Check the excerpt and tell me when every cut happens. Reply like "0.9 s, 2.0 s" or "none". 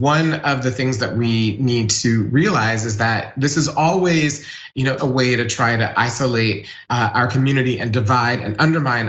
5.0 s, 6.9 s